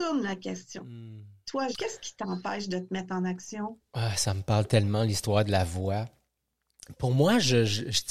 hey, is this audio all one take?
no; 1 cut; at 1.7 s

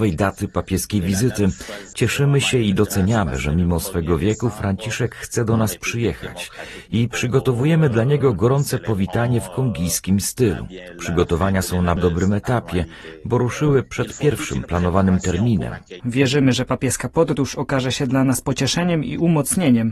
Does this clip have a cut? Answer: yes; 2 cuts; at 12.0 s, 16.0 s

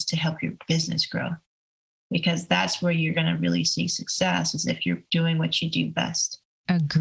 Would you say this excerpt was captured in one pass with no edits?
yes; 0 cuts

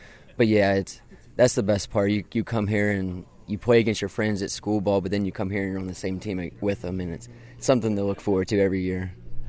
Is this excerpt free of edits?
yes; 0 cuts

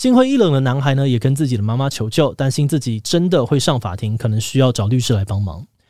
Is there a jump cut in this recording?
no; 0 cuts

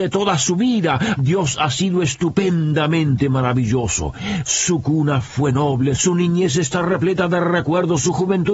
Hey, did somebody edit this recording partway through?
yes; 2 cuts; at 1.2 s, 6.0 s

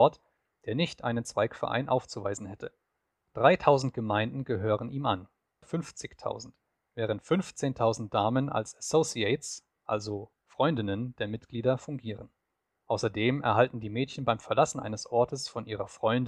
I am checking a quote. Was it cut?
yes; 2 cuts; at 5.6 s, 12.7 s

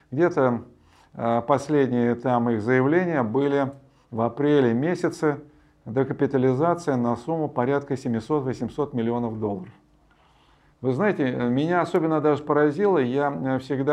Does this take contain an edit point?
no; 0 cuts

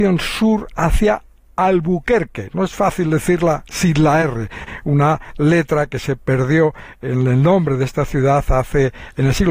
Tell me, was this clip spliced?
no; 0 cuts

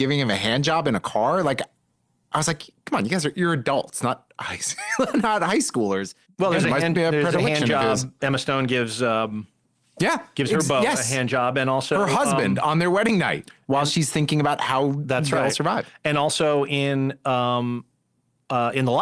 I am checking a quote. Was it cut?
no; 0 cuts

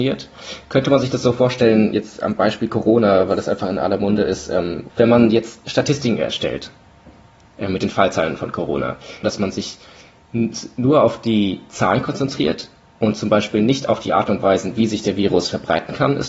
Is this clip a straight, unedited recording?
no; 2 cuts; at 4.9 s, 9.2 s

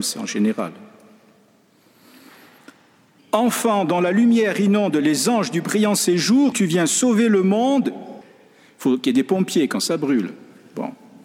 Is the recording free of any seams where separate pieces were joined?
no; 2 cuts; at 6.5 s, 8.2 s

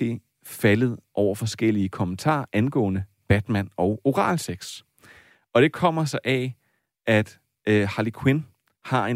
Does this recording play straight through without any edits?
yes; 0 cuts

